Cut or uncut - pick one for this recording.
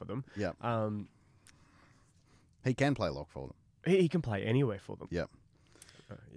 cut